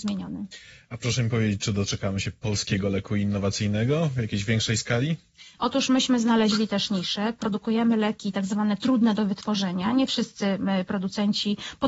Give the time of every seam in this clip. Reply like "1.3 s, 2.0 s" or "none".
5.6 s